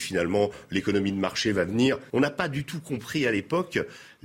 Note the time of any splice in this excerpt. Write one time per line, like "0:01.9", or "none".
0:02.1

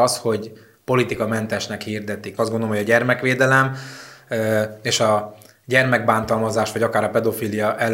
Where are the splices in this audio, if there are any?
0:02.4

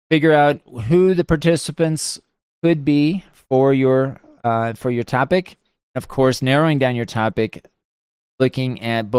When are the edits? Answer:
none

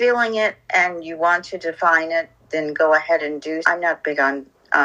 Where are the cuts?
0:03.6

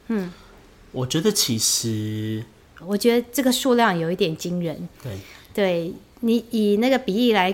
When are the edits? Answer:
0:02.8

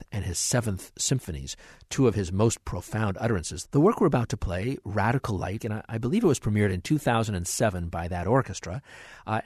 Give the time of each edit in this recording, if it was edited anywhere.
0:03.6
0:05.6

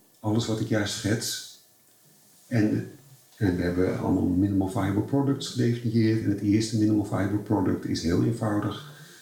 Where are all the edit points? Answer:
none

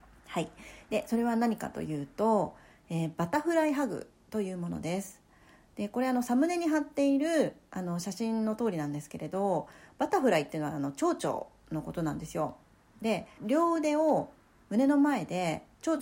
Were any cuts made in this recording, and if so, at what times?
0:13.4

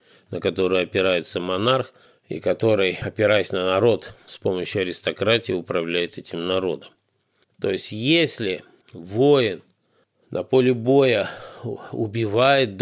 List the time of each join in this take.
0:07.5

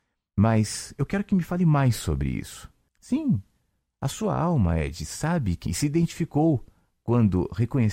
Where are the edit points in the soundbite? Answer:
0:02.9
0:05.7

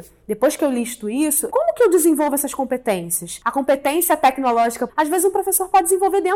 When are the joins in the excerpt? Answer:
0:01.5
0:04.9

